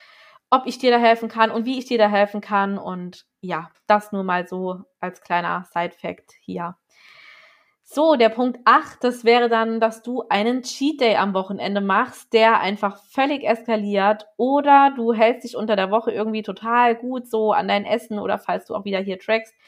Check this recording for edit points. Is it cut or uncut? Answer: uncut